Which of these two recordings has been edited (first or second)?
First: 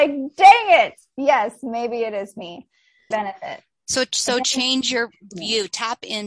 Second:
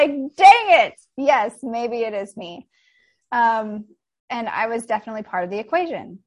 first